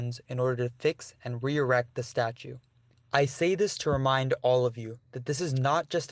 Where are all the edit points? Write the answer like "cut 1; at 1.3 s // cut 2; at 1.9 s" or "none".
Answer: none